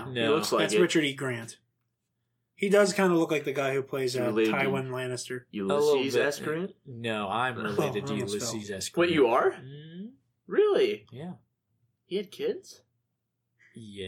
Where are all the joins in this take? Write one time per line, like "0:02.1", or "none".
none